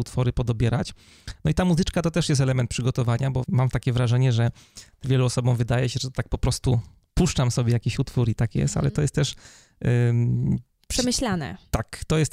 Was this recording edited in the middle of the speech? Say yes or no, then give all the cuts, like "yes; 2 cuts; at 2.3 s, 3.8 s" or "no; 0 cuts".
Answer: yes; 1 cut; at 1.3 s